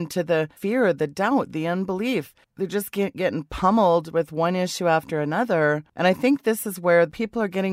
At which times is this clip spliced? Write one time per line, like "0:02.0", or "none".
none